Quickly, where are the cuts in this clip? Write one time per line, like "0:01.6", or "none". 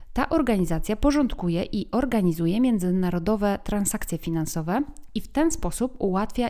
none